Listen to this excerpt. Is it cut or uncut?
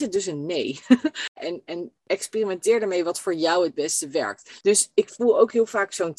cut